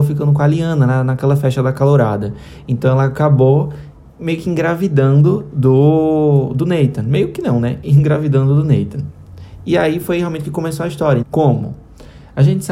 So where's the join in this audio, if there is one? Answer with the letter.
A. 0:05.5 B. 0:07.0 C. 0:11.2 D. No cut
C